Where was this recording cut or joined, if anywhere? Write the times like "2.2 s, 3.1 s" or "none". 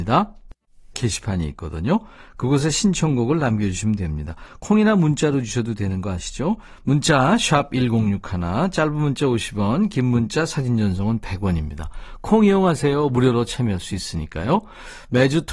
0.9 s